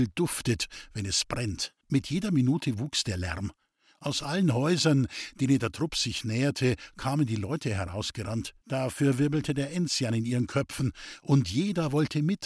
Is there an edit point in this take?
yes; 2 cuts; at 1.8 s, 8.6 s

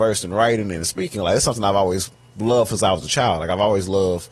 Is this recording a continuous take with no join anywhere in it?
yes; 0 cuts

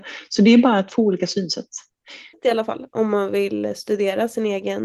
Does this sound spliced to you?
yes; 1 cut; at 2.3 s

